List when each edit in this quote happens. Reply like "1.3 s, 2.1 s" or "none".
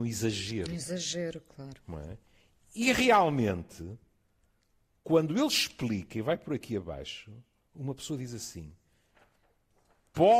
none